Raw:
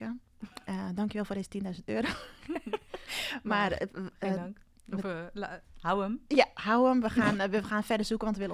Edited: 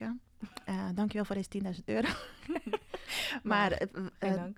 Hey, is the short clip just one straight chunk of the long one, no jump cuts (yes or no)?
yes